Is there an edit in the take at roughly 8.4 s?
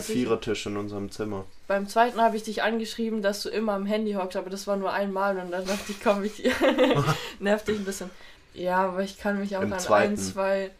yes; 1 cut; at 8.4 s

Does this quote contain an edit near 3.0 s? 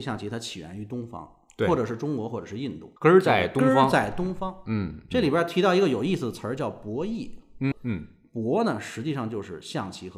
yes; 2 cuts; at 3.0 s, 7.7 s

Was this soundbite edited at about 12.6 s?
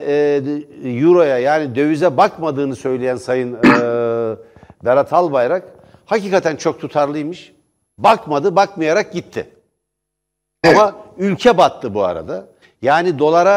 yes; 1 cut; at 12.6 s

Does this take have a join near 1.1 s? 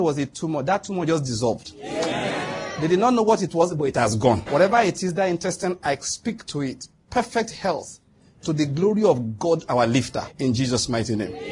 no; 2 cuts; at 4.5 s, 10.3 s

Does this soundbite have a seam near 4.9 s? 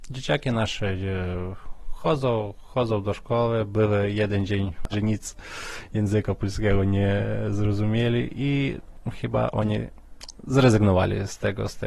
yes; 1 cut; at 4.9 s

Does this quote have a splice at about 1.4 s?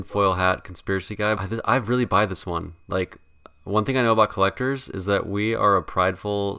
yes; 1 cut; at 1.4 s

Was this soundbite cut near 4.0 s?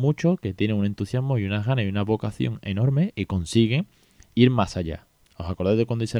no; 1 cut; at 5.2 s

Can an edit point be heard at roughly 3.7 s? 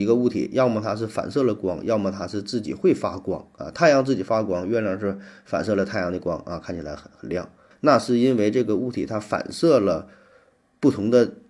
no; 1 cut; at 7.7 s

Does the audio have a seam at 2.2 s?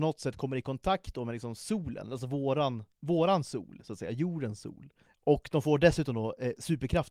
no; 1 cut; at 5.1 s

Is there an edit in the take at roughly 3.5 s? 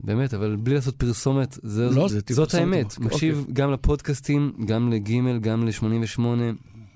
no; 1 cut; at 2.1 s

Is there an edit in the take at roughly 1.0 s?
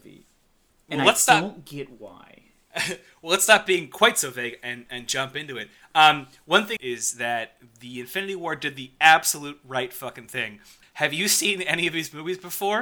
no; 3 cuts; at 4.9 s, 6.8 s, 10.8 s

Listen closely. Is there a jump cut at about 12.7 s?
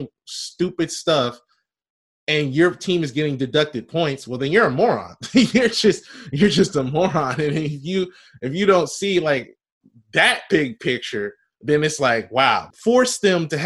yes; 1 cut; at 12.7 s

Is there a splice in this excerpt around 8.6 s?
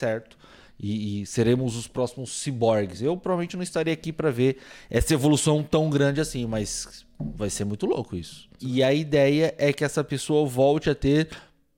yes; 1 cut; at 8.6 s

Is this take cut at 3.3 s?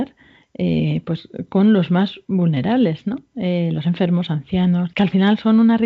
no; 1 cut; at 4.9 s

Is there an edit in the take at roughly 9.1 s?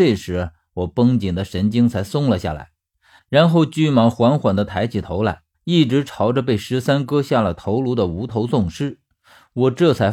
no; 2 cuts; at 3.2 s, 5.5 s

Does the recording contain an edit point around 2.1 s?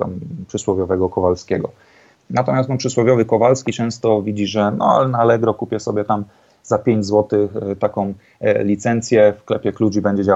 yes; 1 cut; at 2.1 s

